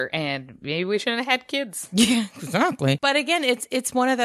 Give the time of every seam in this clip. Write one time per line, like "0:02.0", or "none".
none

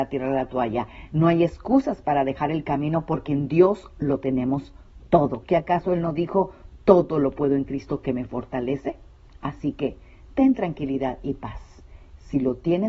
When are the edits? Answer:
none

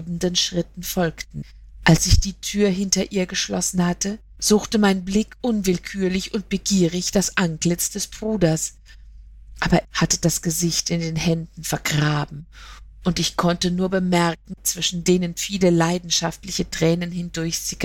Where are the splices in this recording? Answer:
0:09.8
0:14.6

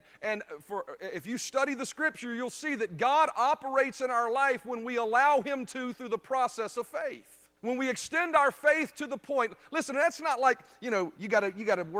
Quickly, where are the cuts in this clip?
0:07.6

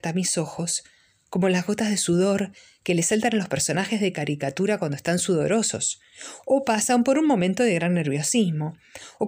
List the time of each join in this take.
none

